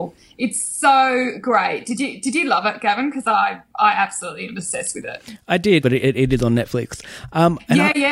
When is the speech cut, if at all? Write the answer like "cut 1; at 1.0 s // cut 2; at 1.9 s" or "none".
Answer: cut 1; at 5.8 s